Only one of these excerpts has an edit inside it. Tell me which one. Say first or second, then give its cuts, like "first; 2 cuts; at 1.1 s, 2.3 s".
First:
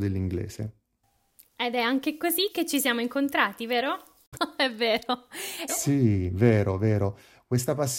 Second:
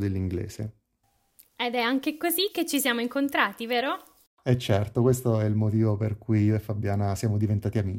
first; 2 cuts; at 4.3 s, 5.7 s